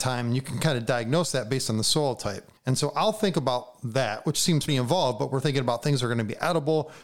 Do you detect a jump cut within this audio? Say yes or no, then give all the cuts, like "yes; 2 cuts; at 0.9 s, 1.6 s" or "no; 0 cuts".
yes; 2 cuts; at 2.6 s, 4.7 s